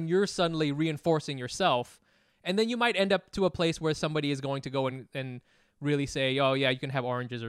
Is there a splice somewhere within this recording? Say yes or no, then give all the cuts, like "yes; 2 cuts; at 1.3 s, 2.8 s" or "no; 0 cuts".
no; 0 cuts